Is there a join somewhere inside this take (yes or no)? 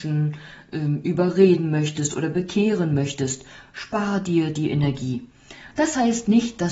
yes